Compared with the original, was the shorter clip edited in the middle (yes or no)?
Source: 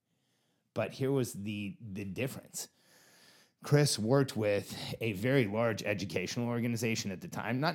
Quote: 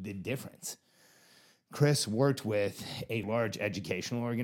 yes